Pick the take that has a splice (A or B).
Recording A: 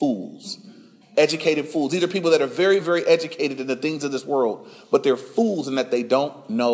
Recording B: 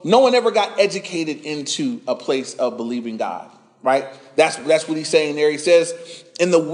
A